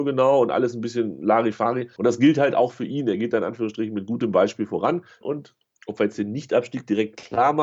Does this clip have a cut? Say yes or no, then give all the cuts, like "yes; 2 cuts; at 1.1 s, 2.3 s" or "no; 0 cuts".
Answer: yes; 2 cuts; at 2.0 s, 5.2 s